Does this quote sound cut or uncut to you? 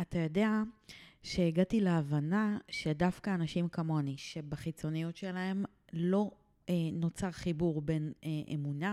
uncut